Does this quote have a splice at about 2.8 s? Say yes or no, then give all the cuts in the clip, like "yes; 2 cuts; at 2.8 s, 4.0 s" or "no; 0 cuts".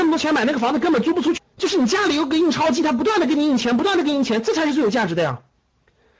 no; 1 cut; at 1.4 s